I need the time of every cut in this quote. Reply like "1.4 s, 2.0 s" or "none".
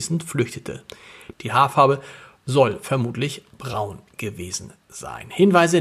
1.3 s